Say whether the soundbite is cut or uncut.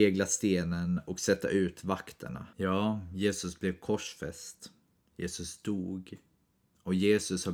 cut